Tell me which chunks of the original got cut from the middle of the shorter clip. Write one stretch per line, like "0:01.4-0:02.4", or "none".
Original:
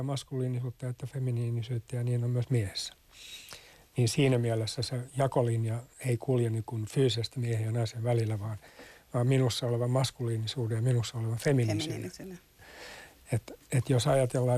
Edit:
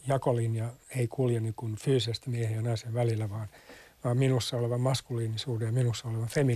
none